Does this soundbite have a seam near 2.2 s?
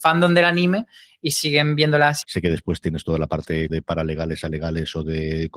yes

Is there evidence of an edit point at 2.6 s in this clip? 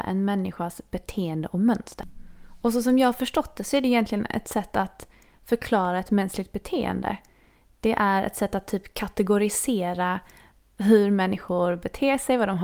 no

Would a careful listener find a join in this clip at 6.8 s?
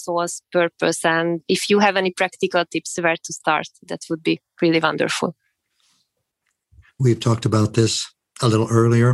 yes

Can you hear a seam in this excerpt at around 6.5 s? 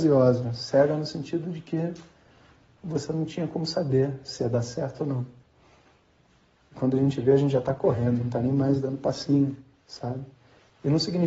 yes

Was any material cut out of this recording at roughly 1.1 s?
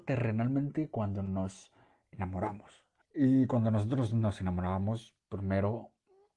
no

